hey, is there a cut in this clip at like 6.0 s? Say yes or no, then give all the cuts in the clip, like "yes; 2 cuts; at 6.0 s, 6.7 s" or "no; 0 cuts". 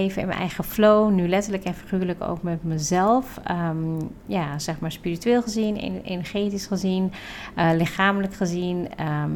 no; 0 cuts